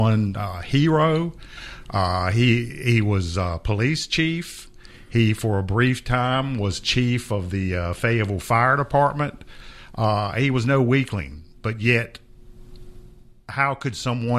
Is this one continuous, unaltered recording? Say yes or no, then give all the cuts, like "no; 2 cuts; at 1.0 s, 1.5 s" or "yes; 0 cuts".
yes; 0 cuts